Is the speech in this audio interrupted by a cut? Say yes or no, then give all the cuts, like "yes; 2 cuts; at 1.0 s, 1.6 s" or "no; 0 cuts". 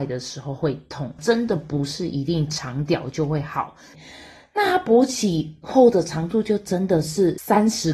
yes; 2 cuts; at 1.2 s, 3.9 s